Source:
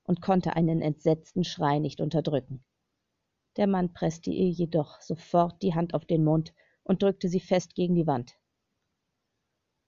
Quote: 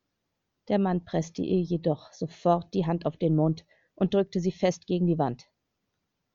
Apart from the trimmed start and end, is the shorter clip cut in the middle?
no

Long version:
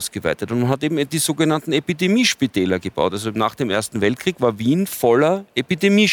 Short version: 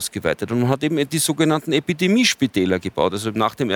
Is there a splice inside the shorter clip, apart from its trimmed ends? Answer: no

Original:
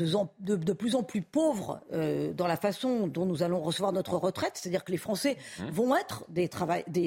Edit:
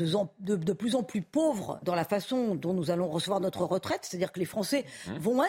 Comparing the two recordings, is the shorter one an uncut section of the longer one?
no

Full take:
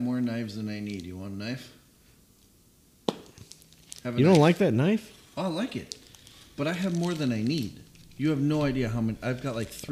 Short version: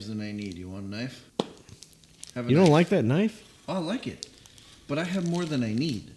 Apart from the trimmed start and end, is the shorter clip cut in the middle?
yes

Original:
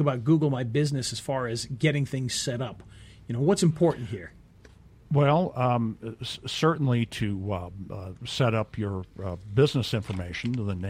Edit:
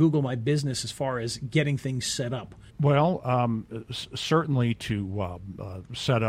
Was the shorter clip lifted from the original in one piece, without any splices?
no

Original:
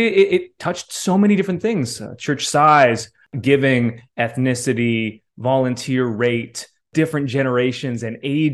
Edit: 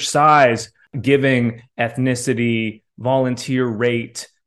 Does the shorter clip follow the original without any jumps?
yes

